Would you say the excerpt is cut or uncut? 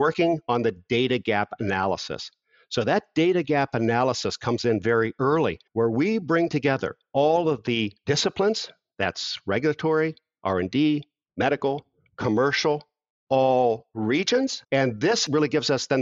cut